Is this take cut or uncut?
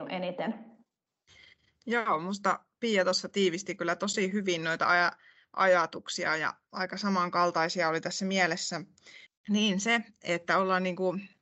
uncut